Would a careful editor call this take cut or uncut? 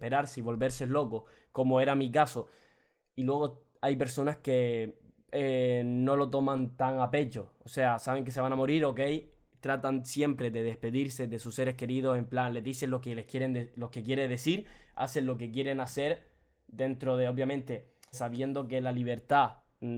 cut